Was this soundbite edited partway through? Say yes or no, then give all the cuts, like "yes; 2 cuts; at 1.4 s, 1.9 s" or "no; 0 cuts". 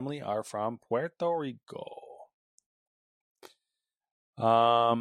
no; 0 cuts